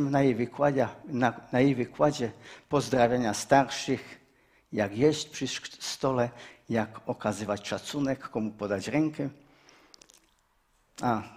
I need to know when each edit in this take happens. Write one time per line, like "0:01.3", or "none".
none